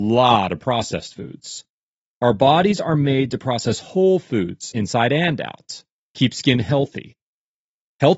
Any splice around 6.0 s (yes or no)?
yes